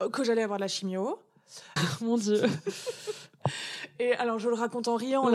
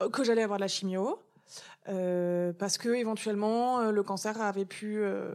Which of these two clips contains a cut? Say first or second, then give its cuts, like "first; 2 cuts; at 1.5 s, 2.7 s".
first; 1 cut; at 1.8 s